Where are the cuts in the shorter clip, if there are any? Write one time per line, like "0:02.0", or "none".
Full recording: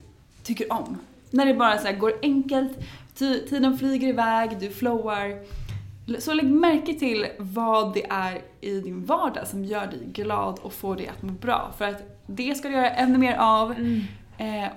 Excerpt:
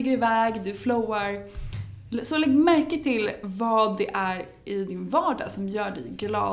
none